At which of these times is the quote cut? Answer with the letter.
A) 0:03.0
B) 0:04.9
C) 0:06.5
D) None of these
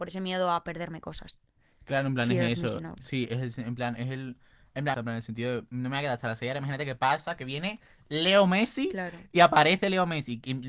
B